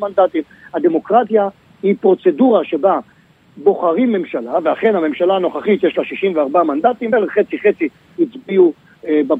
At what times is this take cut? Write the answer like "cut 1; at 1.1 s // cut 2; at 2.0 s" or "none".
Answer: none